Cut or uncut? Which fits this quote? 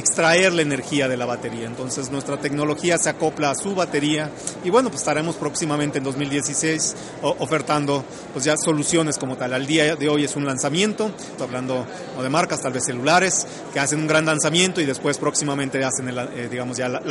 cut